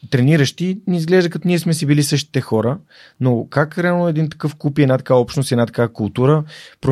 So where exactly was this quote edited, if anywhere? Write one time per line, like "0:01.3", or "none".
none